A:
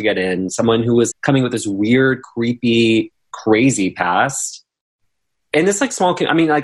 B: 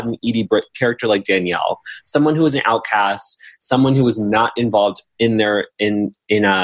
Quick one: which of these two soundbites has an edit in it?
A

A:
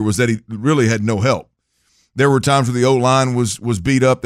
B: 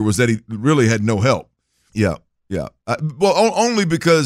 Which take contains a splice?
B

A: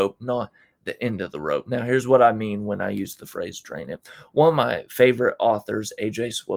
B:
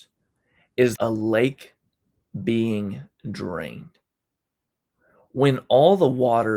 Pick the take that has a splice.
B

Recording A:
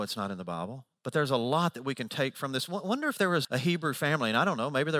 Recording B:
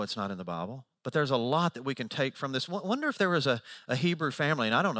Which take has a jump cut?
A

